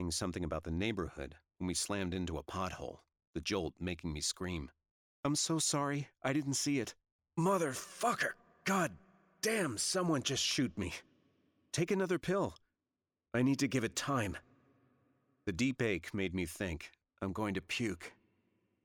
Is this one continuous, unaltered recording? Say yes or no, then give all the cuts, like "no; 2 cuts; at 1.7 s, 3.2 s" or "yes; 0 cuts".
yes; 0 cuts